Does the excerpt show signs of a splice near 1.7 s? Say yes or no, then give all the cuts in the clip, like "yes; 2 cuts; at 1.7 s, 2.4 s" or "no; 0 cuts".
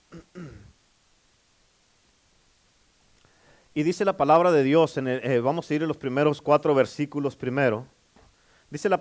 no; 0 cuts